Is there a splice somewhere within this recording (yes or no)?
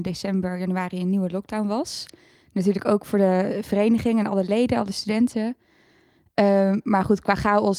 no